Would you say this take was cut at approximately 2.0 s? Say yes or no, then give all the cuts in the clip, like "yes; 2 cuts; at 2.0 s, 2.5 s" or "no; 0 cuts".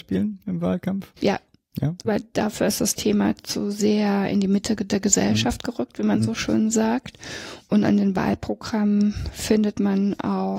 yes; 1 cut; at 2.0 s